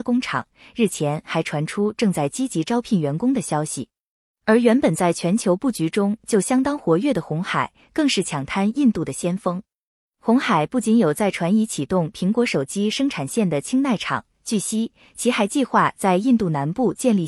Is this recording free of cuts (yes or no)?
yes